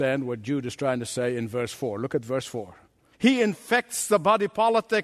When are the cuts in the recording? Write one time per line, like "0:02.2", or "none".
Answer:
0:03.1